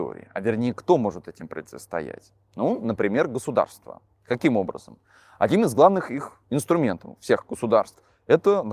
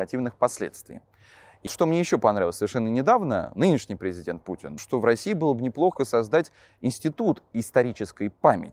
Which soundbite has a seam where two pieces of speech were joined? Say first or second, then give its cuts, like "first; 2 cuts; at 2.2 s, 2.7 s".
second; 2 cuts; at 1.7 s, 4.8 s